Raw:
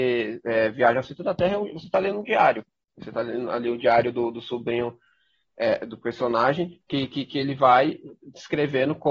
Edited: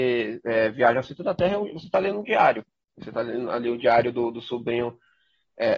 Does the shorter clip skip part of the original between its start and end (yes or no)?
no